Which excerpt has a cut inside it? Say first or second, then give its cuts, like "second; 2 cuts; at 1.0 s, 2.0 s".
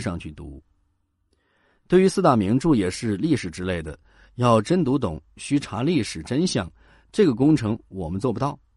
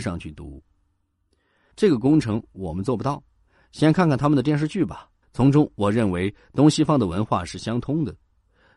second; 2 cuts; at 1.7 s, 5.2 s